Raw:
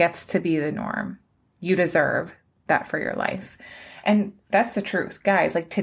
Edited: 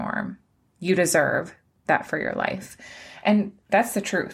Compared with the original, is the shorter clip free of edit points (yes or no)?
yes